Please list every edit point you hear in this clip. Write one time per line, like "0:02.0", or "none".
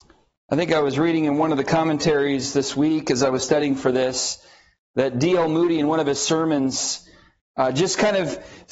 none